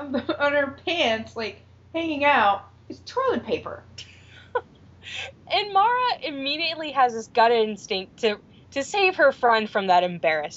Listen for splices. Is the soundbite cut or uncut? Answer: uncut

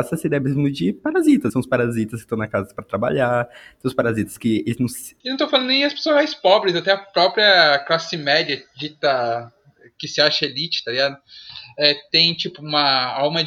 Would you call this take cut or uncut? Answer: cut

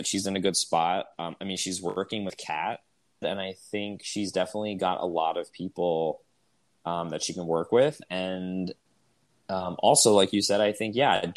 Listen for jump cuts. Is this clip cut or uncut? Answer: cut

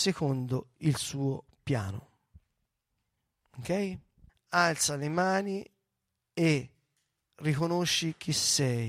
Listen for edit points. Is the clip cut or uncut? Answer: cut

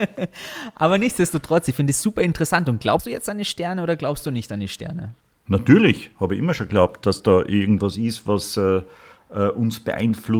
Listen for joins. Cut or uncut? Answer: uncut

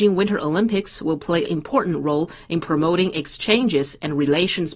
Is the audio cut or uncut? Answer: cut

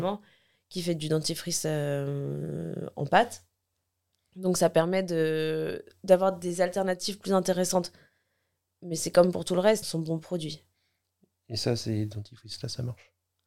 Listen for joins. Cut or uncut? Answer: cut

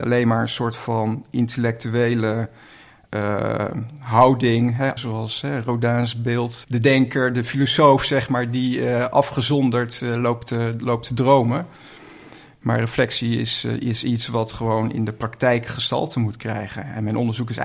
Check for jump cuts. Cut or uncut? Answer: cut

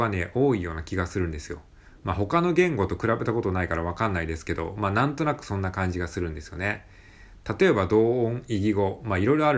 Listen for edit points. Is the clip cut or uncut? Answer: uncut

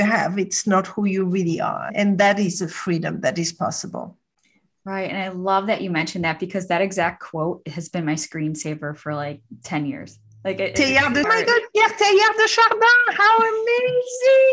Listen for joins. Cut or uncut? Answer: cut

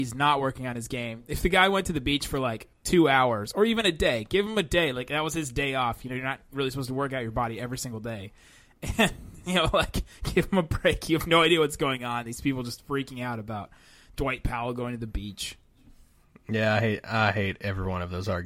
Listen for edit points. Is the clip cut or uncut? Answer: uncut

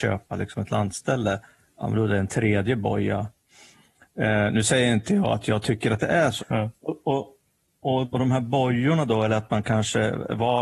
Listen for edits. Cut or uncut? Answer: cut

